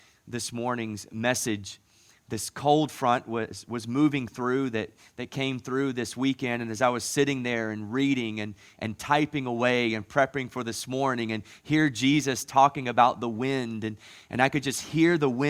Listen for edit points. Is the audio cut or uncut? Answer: uncut